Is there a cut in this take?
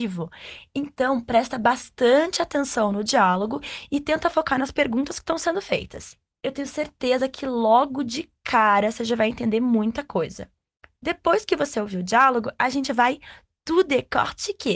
no; 0 cuts

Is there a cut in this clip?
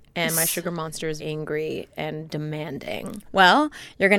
yes; 2 cuts; at 1.2 s, 3.3 s

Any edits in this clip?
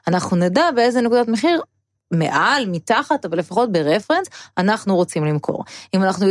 no; 0 cuts

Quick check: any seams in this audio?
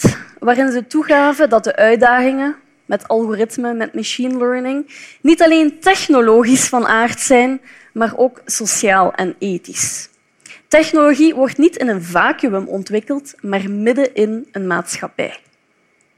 no; 0 cuts

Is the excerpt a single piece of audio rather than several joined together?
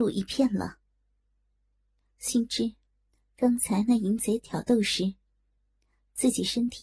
yes; 0 cuts

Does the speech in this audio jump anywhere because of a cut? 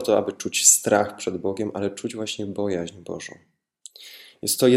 no; 0 cuts

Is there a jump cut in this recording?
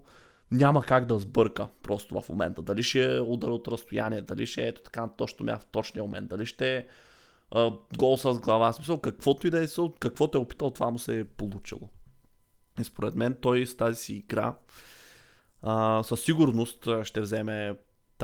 no; 0 cuts

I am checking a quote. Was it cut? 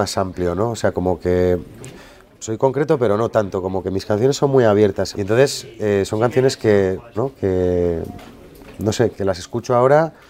yes; 3 cuts; at 5.1 s, 7.2 s, 9.1 s

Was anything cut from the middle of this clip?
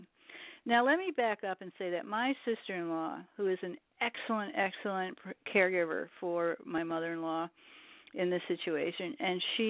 no; 0 cuts

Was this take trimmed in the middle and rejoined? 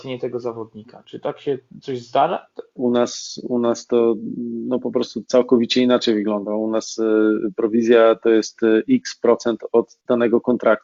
yes; 1 cut; at 2.8 s

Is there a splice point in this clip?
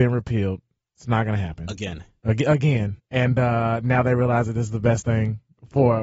yes; 1 cut; at 3.0 s

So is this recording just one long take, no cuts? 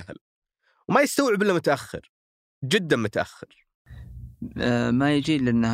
yes; 0 cuts

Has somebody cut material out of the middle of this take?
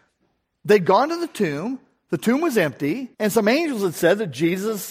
yes; 1 cut; at 3.1 s

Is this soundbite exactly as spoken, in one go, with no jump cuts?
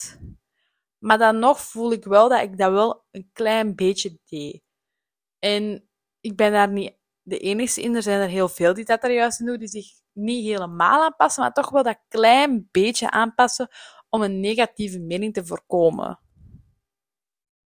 yes; 0 cuts

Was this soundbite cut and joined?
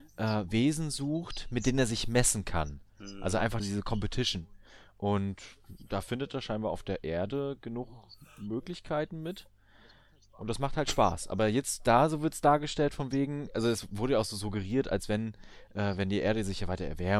yes; 1 cut; at 3.6 s

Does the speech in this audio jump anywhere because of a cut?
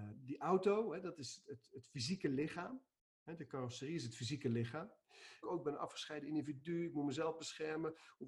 yes; 1 cut; at 5.4 s

